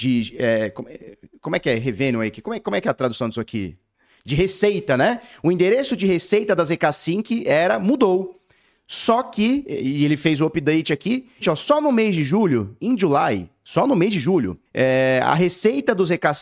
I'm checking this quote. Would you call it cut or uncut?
cut